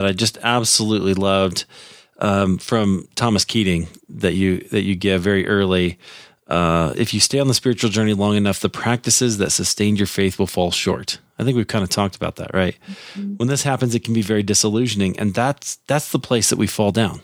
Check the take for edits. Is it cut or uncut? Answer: cut